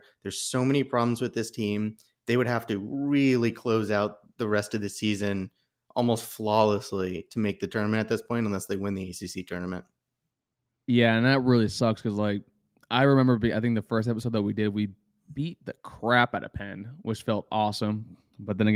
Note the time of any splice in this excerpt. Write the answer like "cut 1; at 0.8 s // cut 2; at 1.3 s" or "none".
none

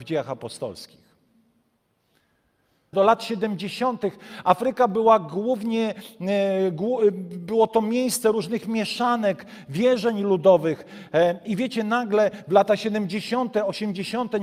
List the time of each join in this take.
cut 1; at 2.9 s

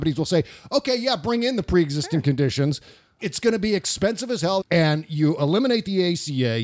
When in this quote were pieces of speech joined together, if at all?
cut 1; at 3.2 s // cut 2; at 4.6 s

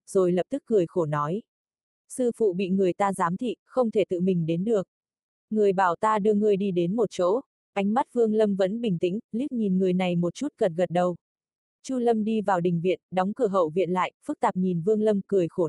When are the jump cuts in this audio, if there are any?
none

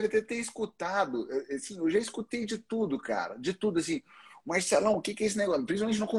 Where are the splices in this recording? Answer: none

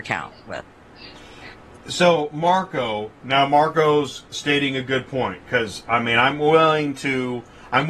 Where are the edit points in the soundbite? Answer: none

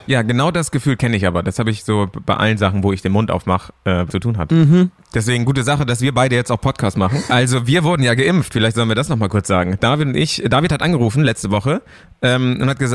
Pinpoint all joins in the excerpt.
cut 1; at 4.1 s // cut 2; at 7.3 s

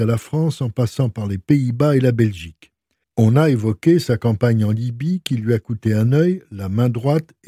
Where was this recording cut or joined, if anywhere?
cut 1; at 3.0 s

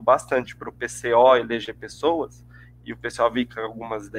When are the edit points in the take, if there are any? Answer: none

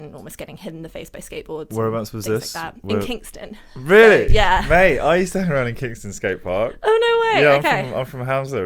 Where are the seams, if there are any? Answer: none

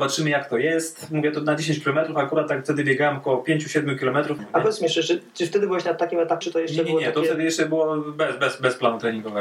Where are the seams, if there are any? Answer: cut 1; at 4.4 s // cut 2; at 6.4 s

